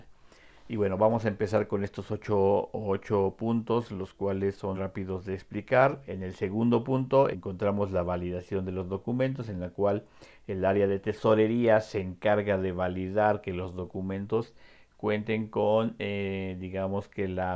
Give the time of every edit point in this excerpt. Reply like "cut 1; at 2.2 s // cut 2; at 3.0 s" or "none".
cut 1; at 4.7 s // cut 2; at 6.1 s // cut 3; at 7.3 s